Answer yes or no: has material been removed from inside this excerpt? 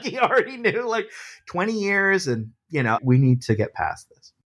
yes